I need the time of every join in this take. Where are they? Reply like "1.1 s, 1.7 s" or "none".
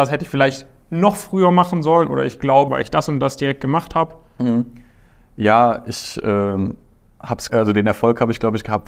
2.7 s, 7.5 s